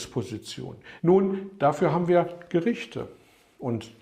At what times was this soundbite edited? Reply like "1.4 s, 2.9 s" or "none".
1.0 s